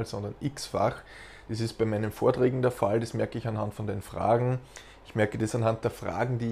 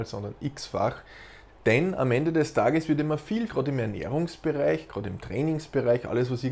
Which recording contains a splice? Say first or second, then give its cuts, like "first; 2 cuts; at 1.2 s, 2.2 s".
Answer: second; 2 cuts; at 1.5 s, 3.5 s